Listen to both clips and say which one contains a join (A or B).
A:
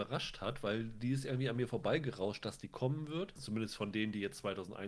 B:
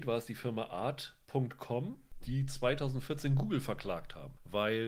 A